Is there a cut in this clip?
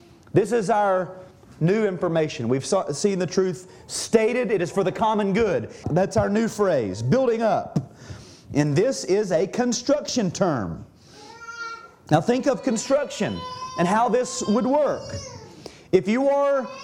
yes; 1 cut; at 5.8 s

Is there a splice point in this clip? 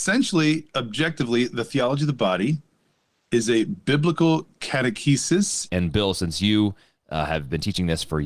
yes; 1 cut; at 5.7 s

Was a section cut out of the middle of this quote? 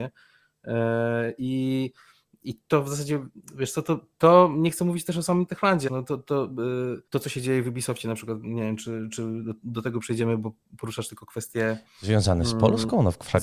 yes; 2 cuts; at 5.9 s, 7.1 s

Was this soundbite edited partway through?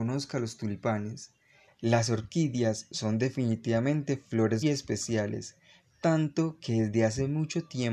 yes; 2 cuts; at 1.7 s, 4.6 s

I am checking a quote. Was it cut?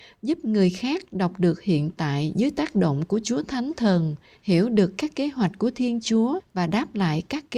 no; 0 cuts

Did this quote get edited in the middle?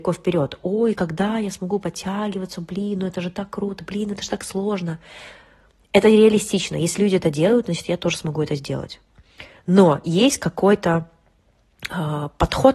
no; 0 cuts

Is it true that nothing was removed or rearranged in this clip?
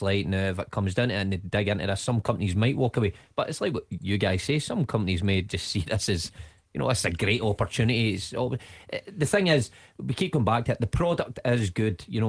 yes; 0 cuts

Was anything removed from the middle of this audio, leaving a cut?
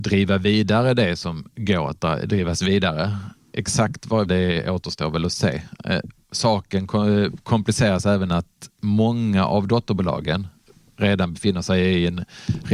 yes; 1 cut; at 4.3 s

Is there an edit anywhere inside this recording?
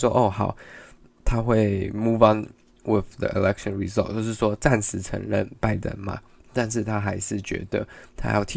no; 0 cuts

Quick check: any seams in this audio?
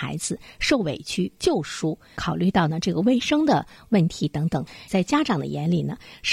yes; 2 cuts; at 1.4 s, 4.9 s

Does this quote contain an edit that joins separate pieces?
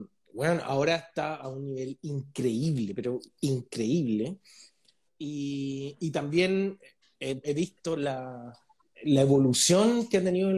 yes; 3 cuts; at 5.1 s, 7.4 s, 8.9 s

